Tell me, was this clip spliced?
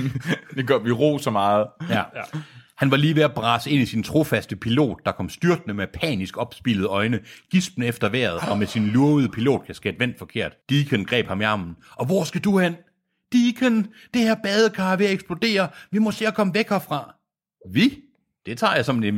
yes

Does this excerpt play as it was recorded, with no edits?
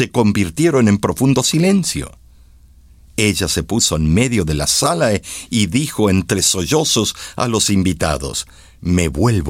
yes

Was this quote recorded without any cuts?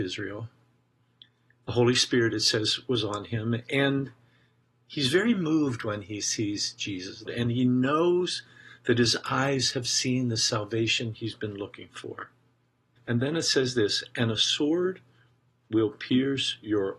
no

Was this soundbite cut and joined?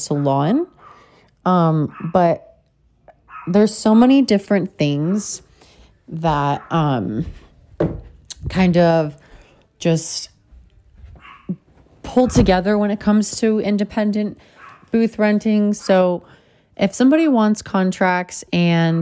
no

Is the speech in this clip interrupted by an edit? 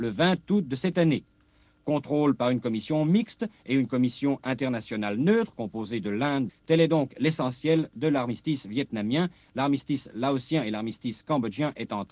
yes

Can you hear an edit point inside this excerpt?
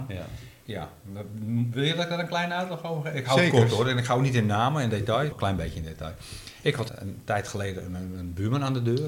yes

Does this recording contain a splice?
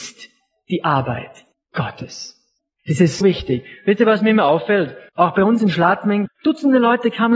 yes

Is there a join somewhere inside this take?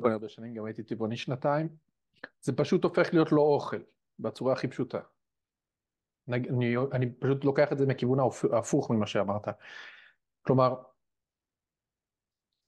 no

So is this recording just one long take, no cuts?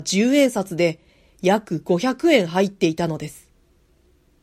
yes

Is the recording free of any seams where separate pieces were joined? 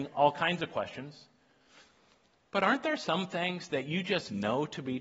yes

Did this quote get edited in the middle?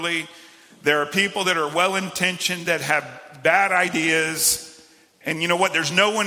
no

